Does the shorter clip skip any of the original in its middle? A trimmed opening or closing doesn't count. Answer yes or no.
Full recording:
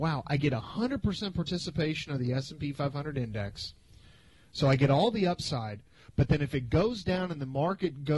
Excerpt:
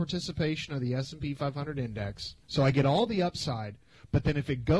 yes